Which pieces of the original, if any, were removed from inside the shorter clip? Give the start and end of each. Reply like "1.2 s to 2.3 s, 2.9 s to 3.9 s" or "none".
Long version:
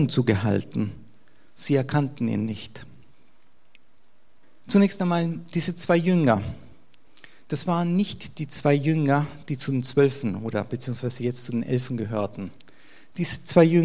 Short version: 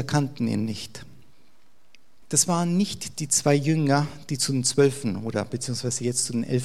4.0 s to 7.4 s